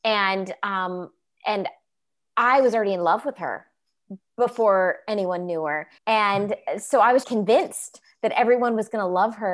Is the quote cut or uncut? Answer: cut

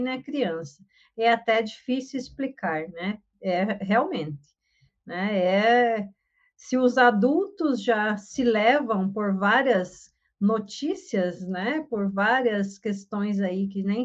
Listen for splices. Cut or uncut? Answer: uncut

